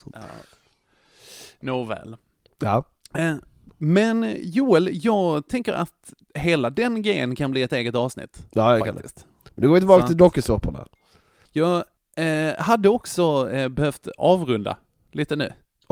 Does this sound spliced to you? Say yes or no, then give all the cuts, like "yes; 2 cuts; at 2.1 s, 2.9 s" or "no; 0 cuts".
no; 0 cuts